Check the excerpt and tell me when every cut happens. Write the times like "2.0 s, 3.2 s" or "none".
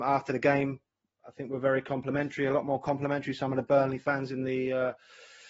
none